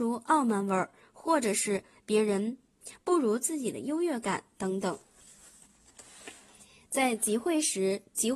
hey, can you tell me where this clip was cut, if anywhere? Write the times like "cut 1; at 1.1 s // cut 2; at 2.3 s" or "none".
none